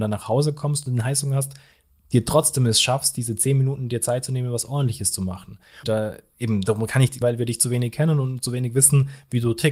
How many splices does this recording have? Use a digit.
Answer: 2